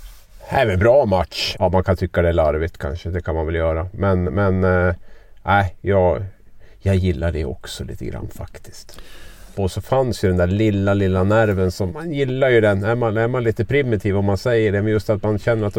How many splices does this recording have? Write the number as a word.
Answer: three